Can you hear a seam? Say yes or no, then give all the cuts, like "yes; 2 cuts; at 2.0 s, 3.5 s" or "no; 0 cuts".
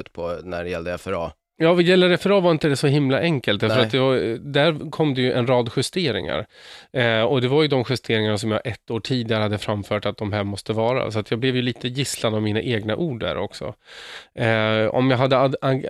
no; 0 cuts